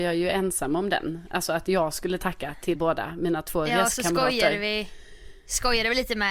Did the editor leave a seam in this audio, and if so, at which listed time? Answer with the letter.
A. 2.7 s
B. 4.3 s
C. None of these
A